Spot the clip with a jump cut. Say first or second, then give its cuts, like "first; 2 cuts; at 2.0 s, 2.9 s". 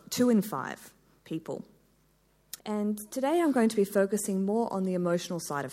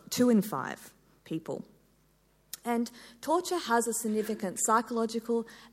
first; 1 cut; at 2.6 s